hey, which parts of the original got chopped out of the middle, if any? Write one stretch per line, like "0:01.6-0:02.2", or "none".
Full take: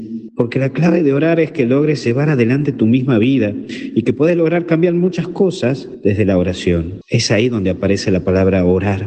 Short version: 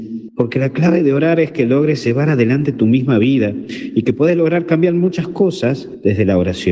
none

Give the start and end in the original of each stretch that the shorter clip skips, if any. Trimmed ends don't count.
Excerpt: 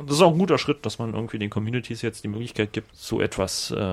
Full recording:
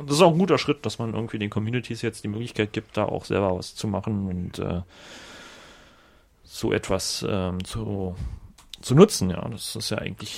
0:02.9-0:06.4

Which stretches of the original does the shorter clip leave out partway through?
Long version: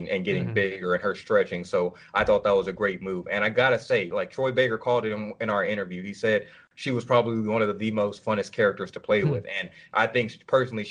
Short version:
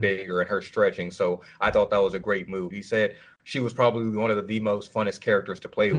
0:03.2-0:06.0

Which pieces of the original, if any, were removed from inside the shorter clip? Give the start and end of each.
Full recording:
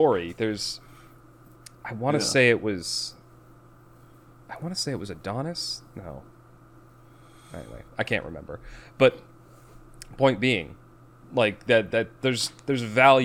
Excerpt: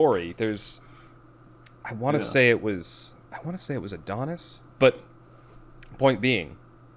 0:03.2-0:04.4
0:05.9-0:08.9

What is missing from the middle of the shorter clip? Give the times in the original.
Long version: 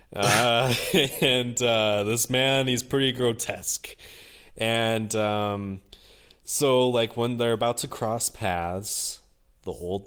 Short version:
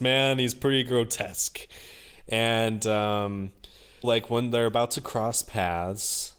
0:06.3-0:06.9

